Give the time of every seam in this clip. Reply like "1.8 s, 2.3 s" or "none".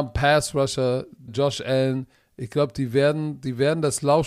1.3 s